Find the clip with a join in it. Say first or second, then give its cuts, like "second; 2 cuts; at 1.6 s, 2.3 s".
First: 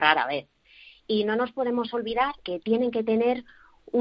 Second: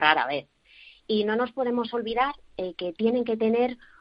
first; 1 cut; at 2.4 s